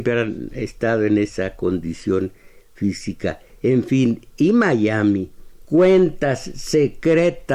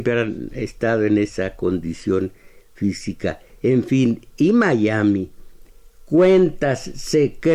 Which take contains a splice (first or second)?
first